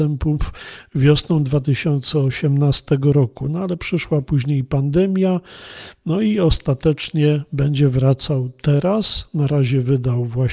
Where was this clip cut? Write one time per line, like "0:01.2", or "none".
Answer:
none